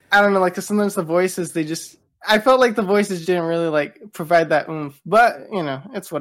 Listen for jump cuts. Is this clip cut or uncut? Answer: cut